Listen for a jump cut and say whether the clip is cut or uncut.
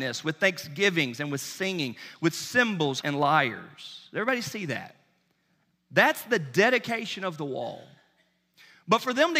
cut